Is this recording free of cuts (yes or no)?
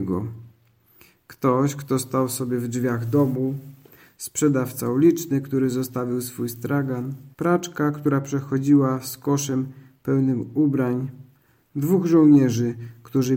no